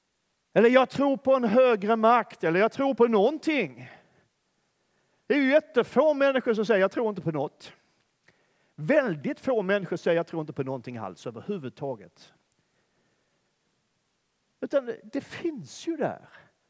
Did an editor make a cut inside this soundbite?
no; 0 cuts

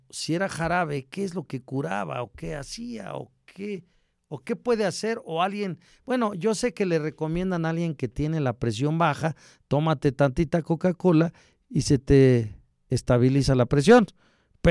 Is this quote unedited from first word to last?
yes; 0 cuts

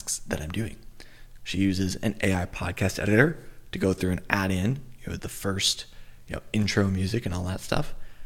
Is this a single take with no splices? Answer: no; 2 cuts; at 1.4 s, 5.2 s

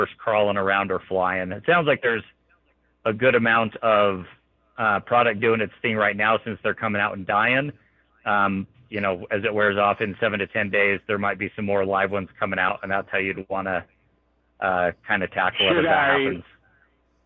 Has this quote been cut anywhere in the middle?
yes; 1 cut; at 8.7 s

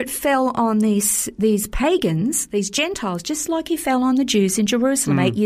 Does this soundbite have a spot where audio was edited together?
no; 0 cuts

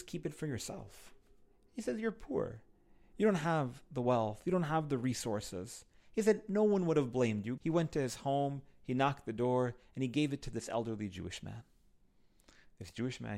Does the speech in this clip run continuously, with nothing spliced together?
no; 1 cut; at 7.6 s

